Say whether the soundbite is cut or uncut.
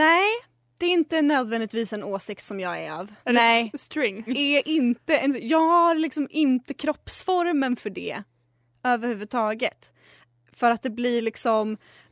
cut